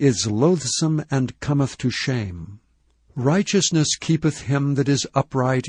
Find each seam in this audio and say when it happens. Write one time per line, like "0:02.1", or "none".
none